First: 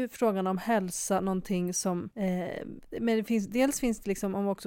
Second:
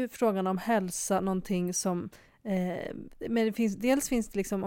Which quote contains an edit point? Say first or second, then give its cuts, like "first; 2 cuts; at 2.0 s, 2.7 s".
first; 1 cut; at 2.1 s